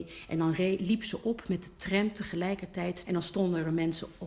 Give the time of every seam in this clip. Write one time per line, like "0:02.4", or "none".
0:03.0